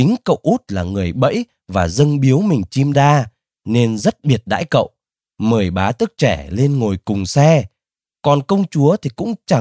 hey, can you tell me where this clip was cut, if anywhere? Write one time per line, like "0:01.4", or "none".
0:02.9